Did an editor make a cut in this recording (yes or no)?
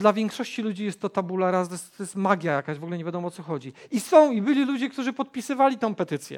no